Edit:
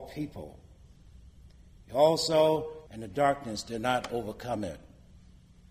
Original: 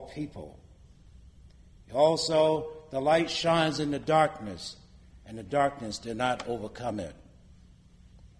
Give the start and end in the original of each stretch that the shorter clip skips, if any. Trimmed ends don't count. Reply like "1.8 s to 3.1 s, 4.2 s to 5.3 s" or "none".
2.9 s to 5.2 s